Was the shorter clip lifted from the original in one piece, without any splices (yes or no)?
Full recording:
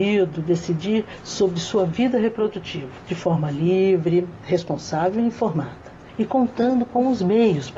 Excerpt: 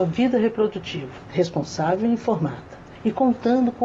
no